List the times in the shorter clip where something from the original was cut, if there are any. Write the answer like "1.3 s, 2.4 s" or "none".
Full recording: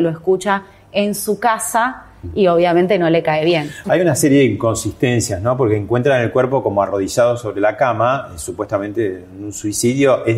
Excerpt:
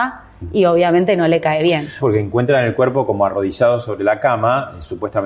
2.0 s